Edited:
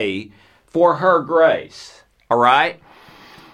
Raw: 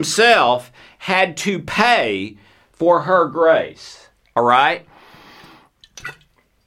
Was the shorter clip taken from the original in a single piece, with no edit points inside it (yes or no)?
yes